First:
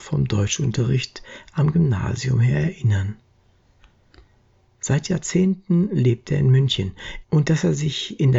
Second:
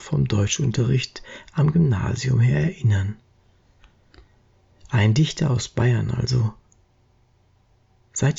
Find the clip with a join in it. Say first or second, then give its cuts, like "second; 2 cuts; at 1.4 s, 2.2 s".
first; 2 cuts; at 4.7 s, 7.2 s